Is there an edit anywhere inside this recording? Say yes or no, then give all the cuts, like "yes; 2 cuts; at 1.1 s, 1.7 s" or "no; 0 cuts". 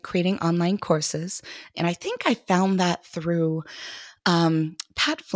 yes; 1 cut; at 1.7 s